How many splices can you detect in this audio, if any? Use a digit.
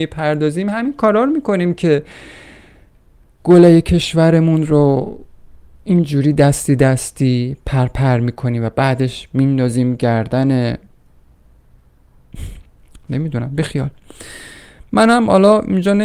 0